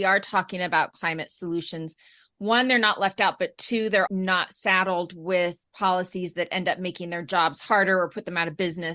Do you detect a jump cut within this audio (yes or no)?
yes